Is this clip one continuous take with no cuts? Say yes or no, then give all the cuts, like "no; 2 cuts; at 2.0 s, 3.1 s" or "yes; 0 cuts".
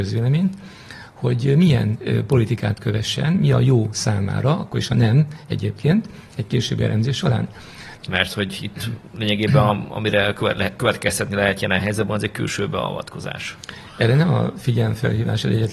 no; 1 cut; at 8.0 s